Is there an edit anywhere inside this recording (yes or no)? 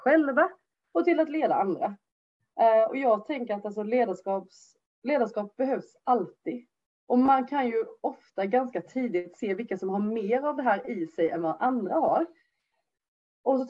no